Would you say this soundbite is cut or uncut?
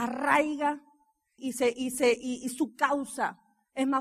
cut